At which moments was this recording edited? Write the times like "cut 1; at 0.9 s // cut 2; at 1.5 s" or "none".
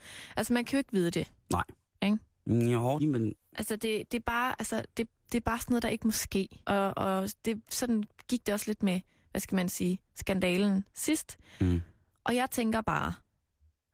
cut 1; at 1.9 s // cut 2; at 3.0 s // cut 3; at 6.6 s